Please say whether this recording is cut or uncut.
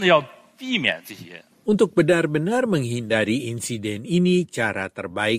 uncut